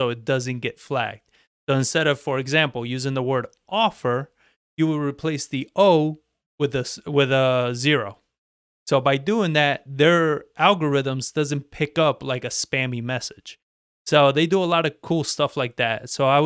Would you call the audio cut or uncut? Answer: uncut